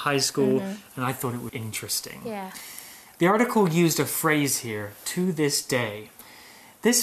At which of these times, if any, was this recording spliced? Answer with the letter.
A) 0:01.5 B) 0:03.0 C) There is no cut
A